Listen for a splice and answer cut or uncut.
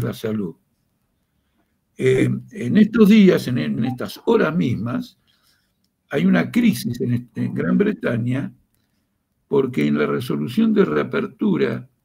cut